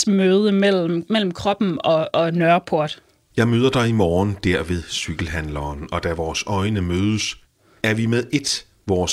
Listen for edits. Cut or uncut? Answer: uncut